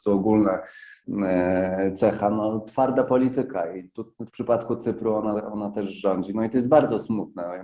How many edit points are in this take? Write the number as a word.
one